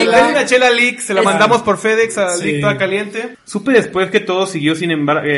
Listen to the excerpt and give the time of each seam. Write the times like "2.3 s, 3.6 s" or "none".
3.3 s